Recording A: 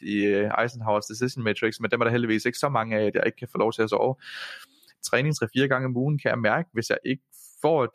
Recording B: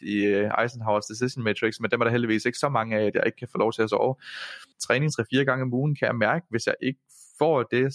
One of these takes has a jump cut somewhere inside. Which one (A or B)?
B